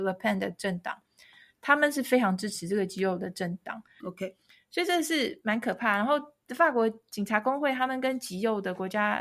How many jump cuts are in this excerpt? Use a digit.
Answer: 1